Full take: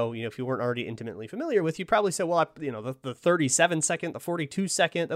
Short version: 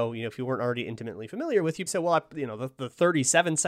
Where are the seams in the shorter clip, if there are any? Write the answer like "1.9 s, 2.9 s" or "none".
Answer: 1.9 s